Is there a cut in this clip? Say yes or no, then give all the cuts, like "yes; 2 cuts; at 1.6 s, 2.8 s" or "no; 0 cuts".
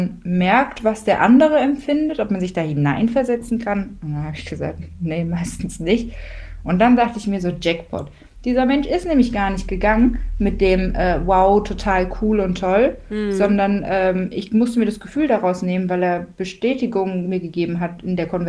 yes; 1 cut; at 6.6 s